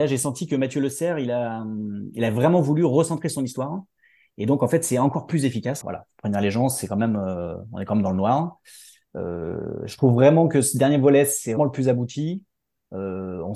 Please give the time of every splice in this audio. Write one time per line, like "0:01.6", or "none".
0:05.8
0:11.6